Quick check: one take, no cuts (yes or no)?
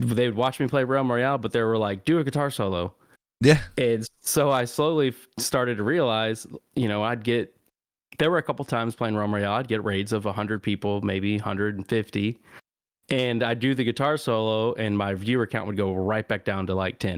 yes